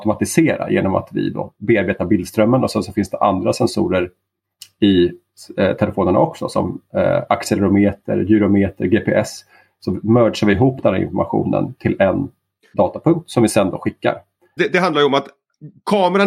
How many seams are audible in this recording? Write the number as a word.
one